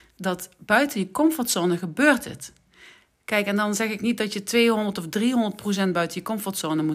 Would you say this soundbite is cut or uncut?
uncut